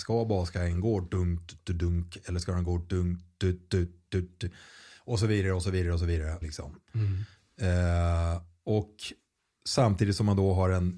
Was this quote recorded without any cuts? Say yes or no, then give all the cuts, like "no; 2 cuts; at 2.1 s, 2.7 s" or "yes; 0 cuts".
no; 2 cuts; at 4.1 s, 6.4 s